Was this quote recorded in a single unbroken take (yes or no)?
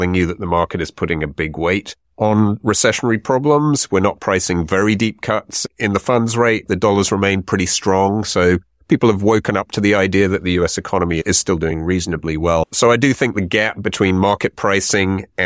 yes